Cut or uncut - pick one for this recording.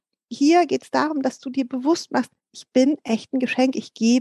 uncut